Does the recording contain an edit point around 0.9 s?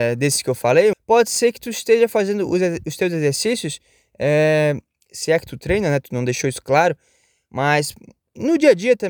yes; 1 cut; at 0.9 s

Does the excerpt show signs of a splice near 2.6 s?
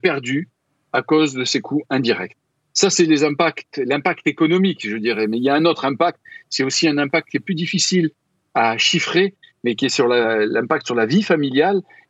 no; 0 cuts

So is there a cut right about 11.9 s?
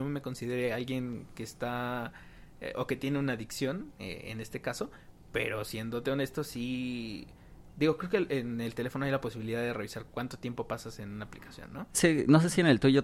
yes; 1 cut; at 11.9 s

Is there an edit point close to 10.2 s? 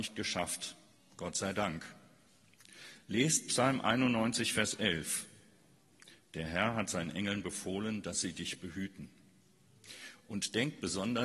no; 0 cuts

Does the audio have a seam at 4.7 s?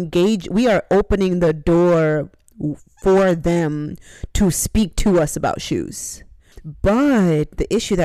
no; 1 cut; at 6.5 s

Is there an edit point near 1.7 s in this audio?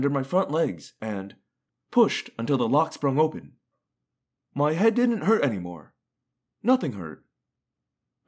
yes; 1 cut; at 1.7 s

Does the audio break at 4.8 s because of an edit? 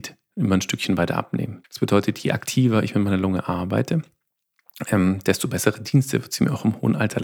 no; 1 cut; at 1.6 s

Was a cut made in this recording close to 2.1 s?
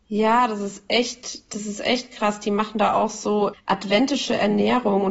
no; 1 cut; at 3.5 s

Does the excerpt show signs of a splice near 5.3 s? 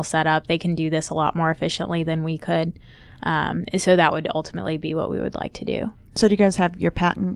no; 0 cuts

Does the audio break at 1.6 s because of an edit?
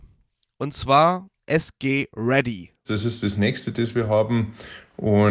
no; 1 cut; at 2.9 s

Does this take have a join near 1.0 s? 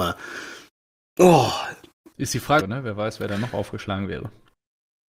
no; 1 cut; at 2.6 s

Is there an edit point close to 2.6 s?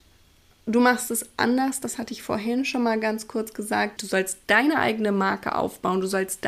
no; 1 cut; at 4.0 s

